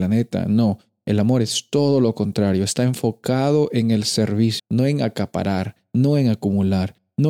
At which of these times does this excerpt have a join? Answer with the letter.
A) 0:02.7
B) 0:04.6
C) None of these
B